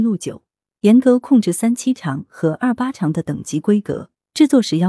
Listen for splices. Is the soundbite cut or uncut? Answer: uncut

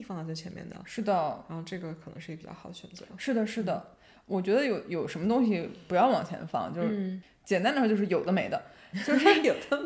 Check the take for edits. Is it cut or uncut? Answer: uncut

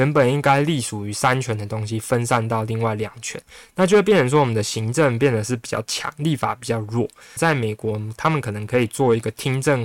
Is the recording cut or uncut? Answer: cut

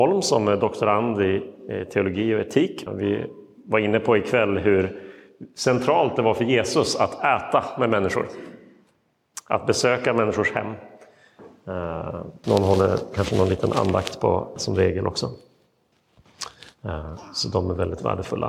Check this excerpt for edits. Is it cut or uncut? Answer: cut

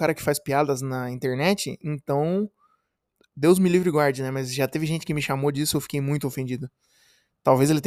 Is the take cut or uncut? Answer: uncut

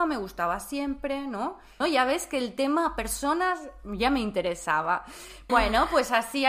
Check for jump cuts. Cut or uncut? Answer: cut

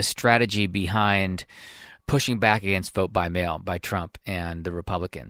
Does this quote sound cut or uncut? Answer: uncut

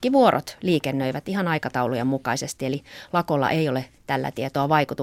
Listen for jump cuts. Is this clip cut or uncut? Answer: uncut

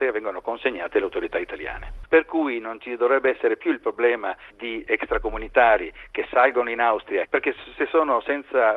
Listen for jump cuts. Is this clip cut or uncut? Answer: cut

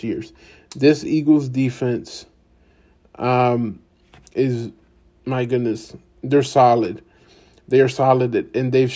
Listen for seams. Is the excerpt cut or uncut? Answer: uncut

